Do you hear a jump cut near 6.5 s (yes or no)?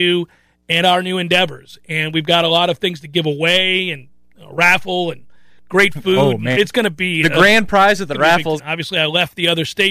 yes